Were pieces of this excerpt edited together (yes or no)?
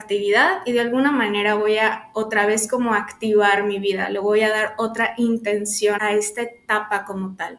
yes